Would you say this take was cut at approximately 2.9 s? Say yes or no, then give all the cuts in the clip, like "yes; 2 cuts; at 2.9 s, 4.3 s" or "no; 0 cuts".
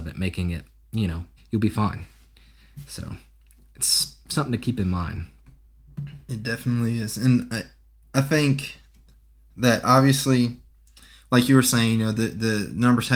no; 1 cut; at 1.4 s